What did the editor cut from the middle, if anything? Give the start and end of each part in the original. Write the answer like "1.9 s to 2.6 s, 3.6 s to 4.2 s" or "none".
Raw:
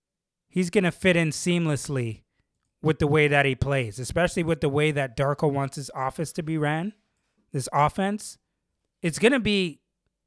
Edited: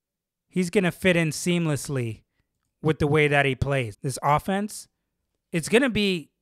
3.9 s to 7.4 s